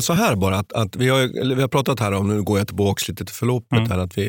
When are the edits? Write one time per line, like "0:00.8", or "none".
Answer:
none